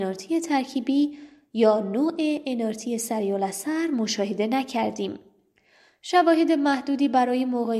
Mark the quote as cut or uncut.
uncut